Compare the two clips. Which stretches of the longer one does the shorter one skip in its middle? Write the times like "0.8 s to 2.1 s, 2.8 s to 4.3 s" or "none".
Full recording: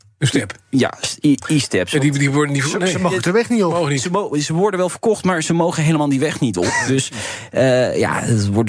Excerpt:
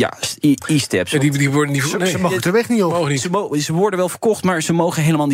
none